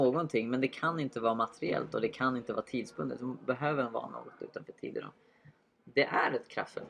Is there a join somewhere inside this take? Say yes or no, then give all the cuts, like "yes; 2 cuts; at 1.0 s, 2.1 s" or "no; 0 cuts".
no; 0 cuts